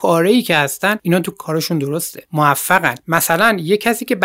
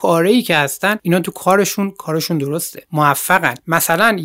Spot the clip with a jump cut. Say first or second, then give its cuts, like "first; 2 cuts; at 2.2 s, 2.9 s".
first; 1 cut; at 1.3 s